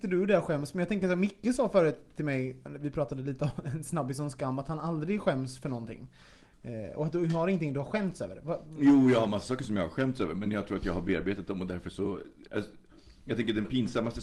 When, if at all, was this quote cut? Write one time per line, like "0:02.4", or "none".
0:12.5